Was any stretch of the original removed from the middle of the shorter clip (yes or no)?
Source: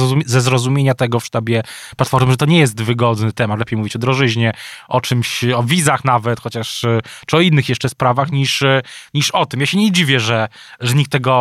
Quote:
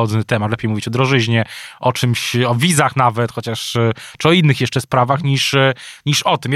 no